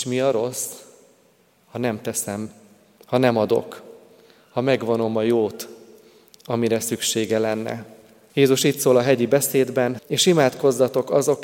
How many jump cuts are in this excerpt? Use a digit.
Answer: 2